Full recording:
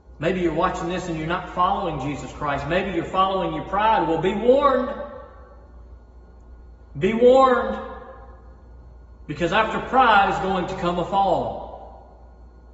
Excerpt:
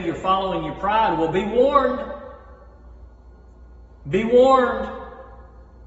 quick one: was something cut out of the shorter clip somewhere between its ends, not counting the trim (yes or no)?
no